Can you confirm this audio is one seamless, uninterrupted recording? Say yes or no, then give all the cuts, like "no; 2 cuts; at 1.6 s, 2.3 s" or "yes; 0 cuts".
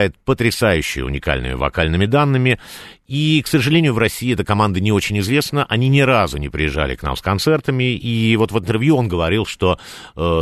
yes; 0 cuts